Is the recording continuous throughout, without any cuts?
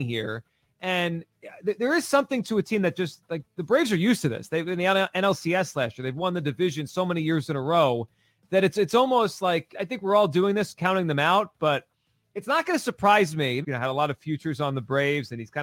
no; 2 cuts; at 9.7 s, 13.6 s

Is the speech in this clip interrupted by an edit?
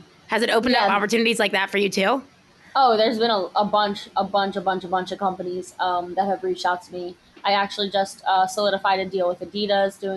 no; 0 cuts

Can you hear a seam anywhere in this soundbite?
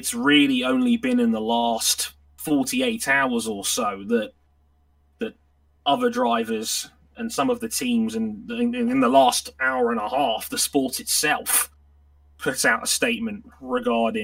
no; 0 cuts

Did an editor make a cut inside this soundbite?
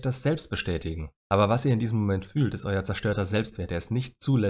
yes; 1 cut; at 1.2 s

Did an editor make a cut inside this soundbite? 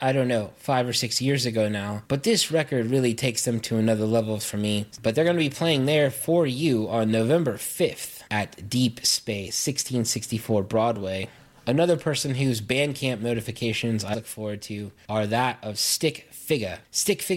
yes; 2 cuts; at 5.0 s, 14.1 s

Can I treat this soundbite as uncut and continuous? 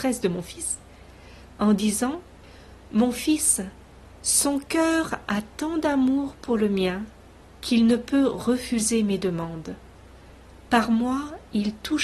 yes; 0 cuts

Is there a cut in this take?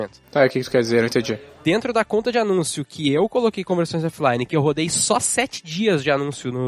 no; 0 cuts

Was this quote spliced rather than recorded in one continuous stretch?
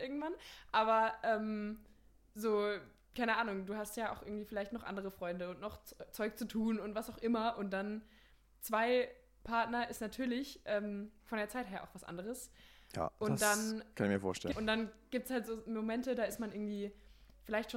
yes; 1 cut; at 14.5 s

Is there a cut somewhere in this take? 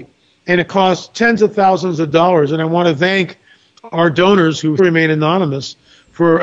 yes; 1 cut; at 4.8 s

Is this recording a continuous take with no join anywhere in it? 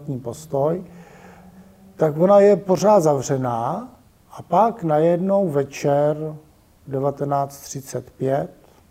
yes; 0 cuts

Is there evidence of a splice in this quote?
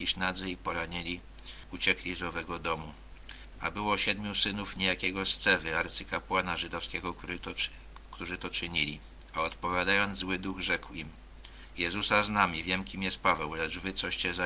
yes; 1 cut; at 3.5 s

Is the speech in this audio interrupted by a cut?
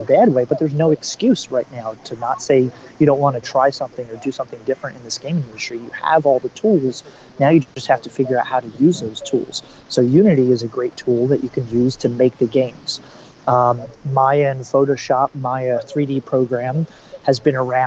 no; 0 cuts

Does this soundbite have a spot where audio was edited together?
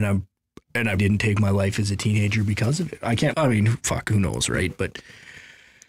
yes; 2 cuts; at 1.0 s, 3.3 s

